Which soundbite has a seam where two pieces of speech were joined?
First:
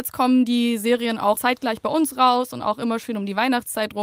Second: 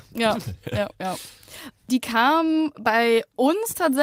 first; 1 cut; at 1.4 s

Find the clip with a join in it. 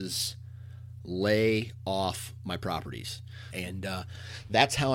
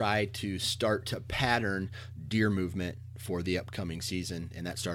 first; 1 cut; at 3.5 s

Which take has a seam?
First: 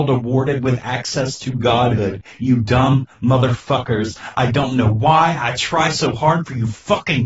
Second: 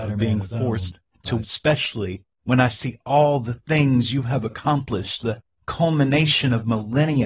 second; 1 cut; at 1.4 s

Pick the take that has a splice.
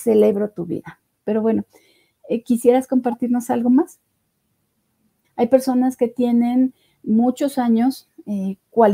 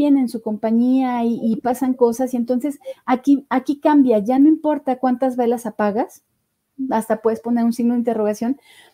first; 1 cut; at 5.2 s

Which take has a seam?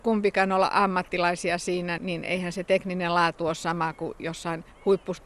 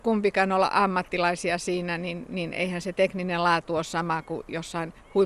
first; 1 cut; at 2.0 s

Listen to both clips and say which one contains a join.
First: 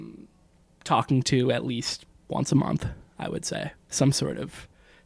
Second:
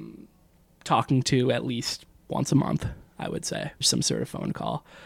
second; 1 cut; at 3.8 s

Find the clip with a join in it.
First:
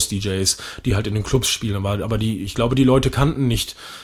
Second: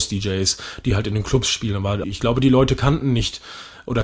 second; 1 cut; at 2.0 s

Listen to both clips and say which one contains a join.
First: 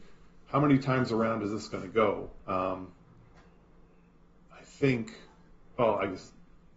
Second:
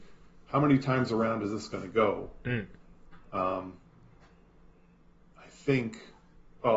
first; 1 cut; at 2.4 s

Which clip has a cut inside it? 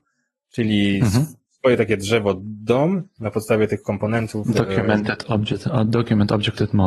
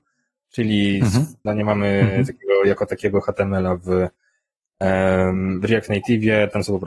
second; 1 cut; at 1.5 s

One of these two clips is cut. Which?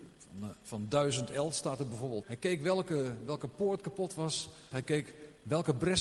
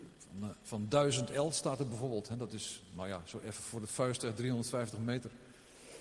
first; 2 cuts; at 2.2 s, 4.7 s

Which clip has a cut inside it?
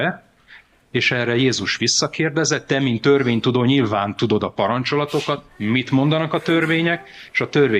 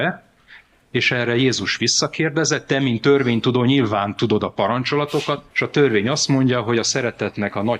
second; 1 cut; at 5.5 s

